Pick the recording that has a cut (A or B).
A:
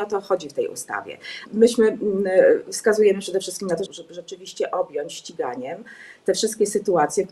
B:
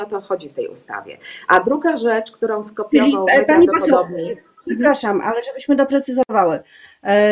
A